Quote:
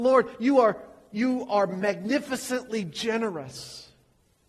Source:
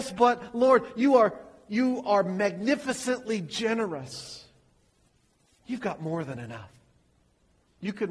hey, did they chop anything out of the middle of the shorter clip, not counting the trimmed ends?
no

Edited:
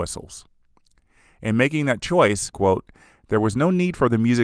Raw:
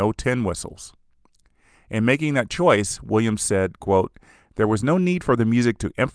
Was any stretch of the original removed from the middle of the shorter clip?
yes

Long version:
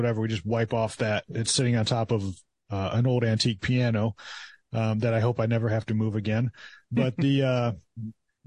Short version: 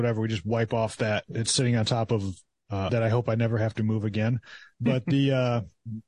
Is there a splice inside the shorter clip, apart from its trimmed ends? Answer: yes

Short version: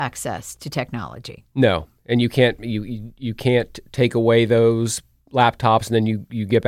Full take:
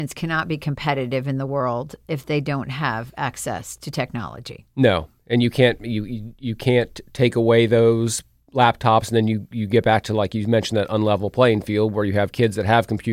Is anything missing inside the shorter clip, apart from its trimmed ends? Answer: no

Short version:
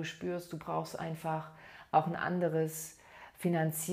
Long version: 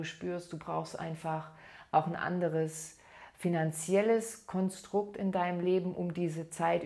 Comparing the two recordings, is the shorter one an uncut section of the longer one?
yes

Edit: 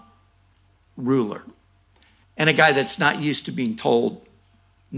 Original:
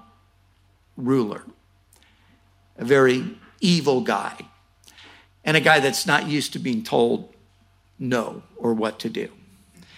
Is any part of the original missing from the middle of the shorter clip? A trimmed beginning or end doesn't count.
yes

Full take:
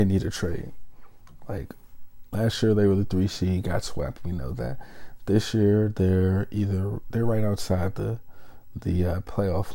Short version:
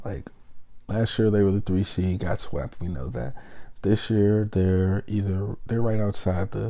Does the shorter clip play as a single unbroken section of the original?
yes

